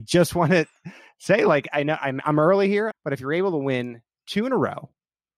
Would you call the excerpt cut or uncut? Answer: cut